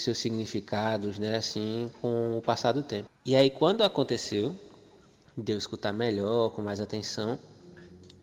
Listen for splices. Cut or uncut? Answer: cut